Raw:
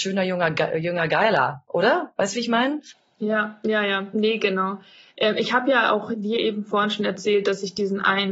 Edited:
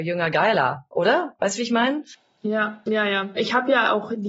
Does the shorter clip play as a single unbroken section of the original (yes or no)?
no